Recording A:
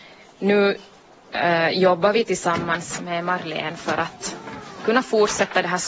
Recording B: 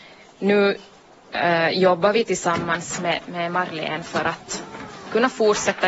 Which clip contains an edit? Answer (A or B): A